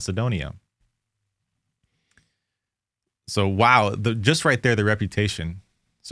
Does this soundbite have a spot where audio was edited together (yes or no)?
no